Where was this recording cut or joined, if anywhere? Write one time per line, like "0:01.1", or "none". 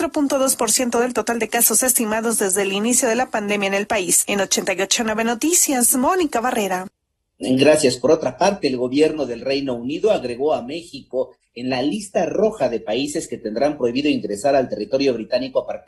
none